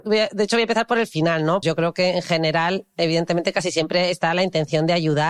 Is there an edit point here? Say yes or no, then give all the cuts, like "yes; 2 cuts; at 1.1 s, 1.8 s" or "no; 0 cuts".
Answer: yes; 1 cut; at 1.6 s